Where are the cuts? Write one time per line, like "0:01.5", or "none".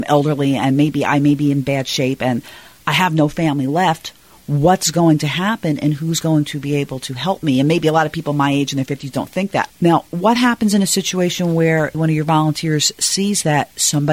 0:09.7
0:11.9